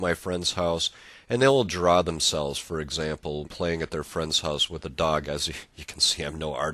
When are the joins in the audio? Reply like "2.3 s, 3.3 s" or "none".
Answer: 3.4 s